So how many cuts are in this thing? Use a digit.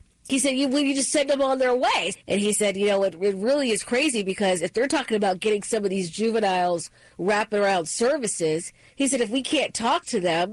1